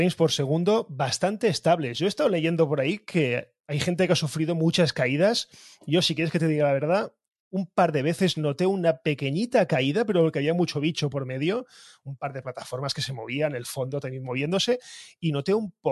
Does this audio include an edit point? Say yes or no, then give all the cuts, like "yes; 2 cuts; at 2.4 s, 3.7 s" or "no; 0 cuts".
no; 0 cuts